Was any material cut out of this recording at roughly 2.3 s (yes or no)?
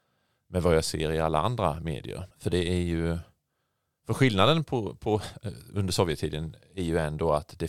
yes